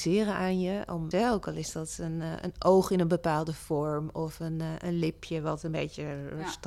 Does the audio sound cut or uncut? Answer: cut